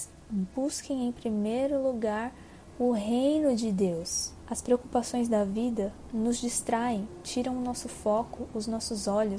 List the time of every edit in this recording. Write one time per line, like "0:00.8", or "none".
none